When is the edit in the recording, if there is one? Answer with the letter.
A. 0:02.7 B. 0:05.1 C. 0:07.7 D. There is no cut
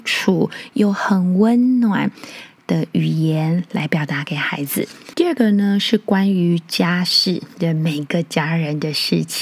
B